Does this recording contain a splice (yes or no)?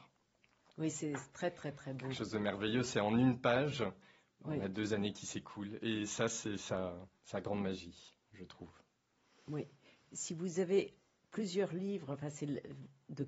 no